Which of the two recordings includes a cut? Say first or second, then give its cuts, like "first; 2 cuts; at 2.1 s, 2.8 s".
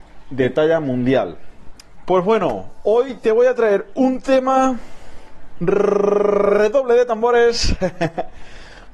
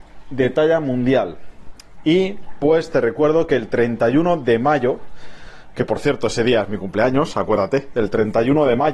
first; 1 cut; at 2.0 s